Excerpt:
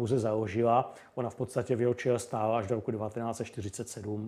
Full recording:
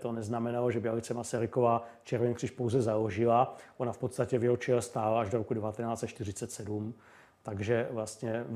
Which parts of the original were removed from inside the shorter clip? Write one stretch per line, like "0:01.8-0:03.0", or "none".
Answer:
none